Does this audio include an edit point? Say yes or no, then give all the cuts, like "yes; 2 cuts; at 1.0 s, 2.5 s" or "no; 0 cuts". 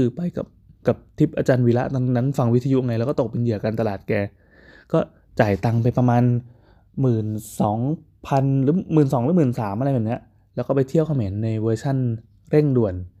no; 0 cuts